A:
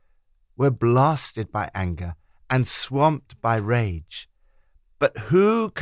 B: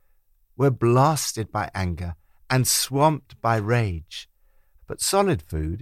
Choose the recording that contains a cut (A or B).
B